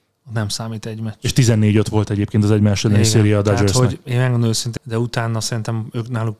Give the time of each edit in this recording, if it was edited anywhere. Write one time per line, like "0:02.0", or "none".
0:04.8